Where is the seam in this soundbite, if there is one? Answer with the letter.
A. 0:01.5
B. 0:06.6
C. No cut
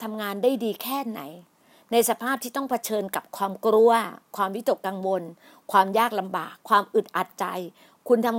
B